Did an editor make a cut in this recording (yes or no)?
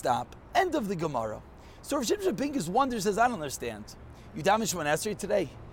no